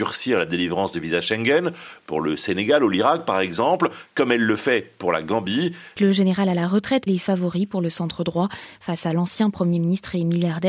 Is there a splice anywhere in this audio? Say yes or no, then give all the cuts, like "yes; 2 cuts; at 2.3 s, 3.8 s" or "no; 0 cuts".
yes; 2 cuts; at 6.0 s, 7.1 s